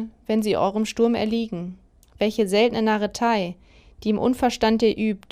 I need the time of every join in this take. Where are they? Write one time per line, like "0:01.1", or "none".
0:02.0